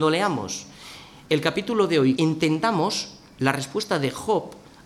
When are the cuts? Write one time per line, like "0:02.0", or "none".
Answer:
0:02.2